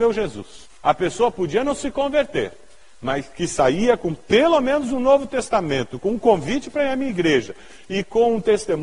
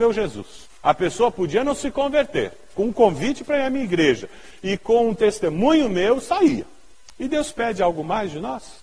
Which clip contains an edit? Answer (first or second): second